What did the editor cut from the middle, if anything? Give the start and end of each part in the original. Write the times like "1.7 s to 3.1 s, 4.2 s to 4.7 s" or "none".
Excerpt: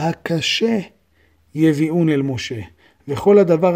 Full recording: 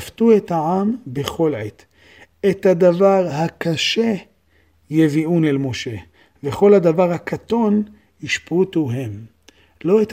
none